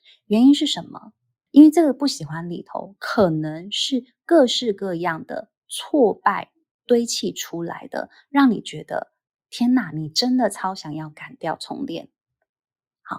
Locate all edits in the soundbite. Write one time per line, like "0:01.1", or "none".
0:01.5